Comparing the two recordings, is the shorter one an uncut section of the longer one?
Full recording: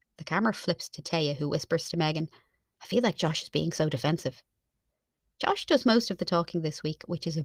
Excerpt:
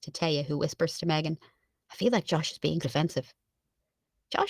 no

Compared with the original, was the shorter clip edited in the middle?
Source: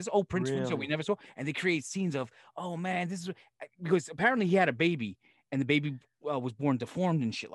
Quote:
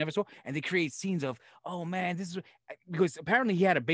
no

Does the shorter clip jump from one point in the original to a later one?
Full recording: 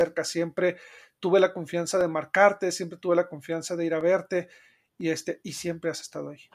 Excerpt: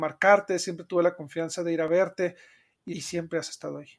yes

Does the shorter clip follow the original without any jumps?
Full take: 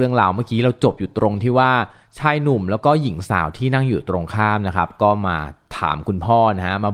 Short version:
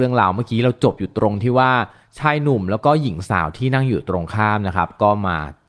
yes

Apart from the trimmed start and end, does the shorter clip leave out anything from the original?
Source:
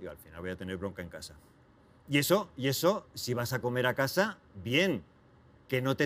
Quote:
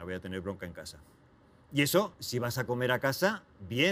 yes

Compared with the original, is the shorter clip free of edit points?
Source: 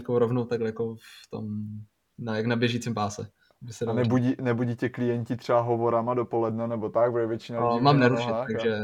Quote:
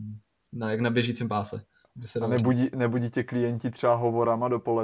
yes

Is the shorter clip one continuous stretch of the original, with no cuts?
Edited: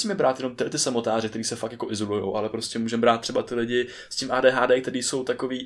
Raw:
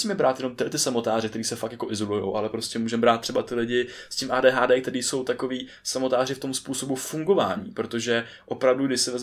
yes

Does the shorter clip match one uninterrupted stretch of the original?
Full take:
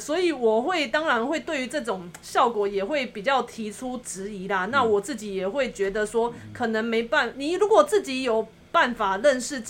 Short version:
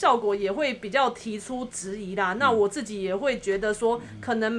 yes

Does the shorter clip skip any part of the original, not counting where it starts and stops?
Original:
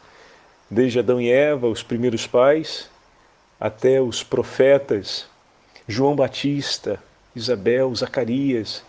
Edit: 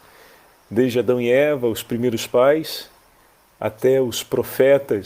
no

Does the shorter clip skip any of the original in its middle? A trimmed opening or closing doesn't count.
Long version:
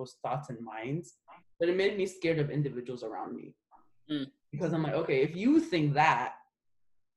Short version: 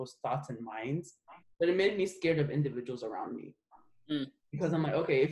no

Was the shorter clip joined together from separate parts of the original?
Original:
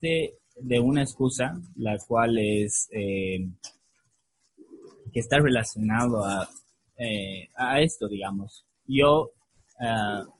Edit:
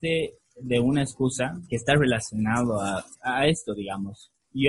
yes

